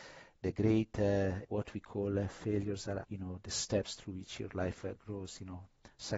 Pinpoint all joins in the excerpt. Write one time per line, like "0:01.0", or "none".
0:01.4
0:03.0